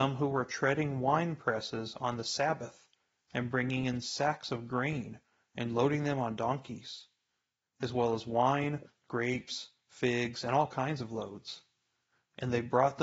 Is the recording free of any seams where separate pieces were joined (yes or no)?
yes